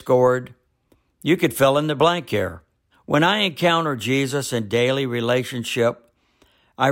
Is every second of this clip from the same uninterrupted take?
no; 1 cut; at 2.9 s

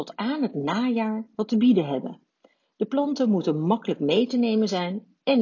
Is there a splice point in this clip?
no; 0 cuts

